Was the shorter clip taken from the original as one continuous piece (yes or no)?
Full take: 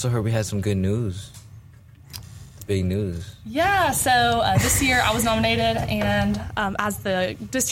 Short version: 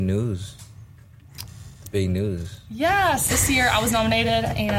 no